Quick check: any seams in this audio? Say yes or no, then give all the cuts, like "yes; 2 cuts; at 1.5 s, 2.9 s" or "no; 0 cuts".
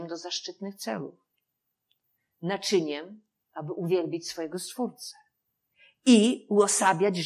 no; 0 cuts